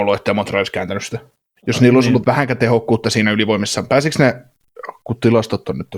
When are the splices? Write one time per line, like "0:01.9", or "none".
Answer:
0:02.2

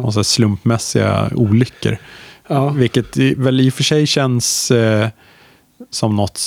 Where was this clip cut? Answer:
none

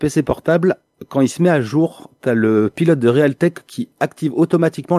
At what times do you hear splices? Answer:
none

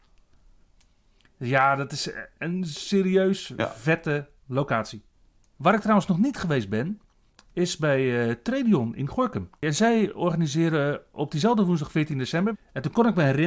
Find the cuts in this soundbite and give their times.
0:09.6
0:12.5

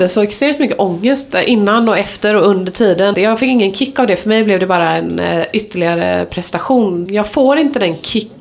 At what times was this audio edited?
0:03.1
0:07.1

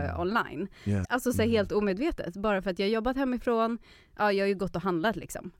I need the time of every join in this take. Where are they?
0:01.0

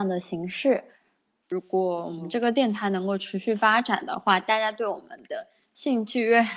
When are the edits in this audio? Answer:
0:01.4

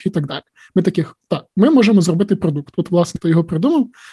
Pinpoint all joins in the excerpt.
0:03.2

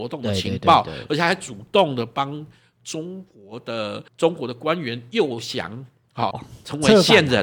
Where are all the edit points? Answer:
0:04.1
0:06.3

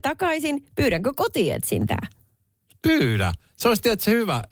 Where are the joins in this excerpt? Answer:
none

